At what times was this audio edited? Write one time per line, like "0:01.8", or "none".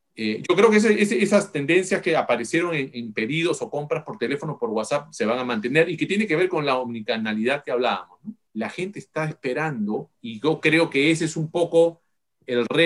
0:08.5
0:10.1